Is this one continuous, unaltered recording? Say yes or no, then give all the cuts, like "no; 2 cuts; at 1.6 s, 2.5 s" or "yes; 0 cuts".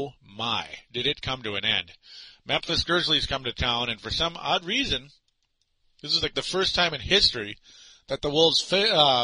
yes; 0 cuts